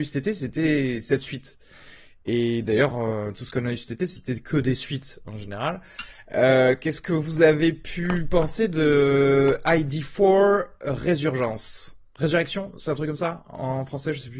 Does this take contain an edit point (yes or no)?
no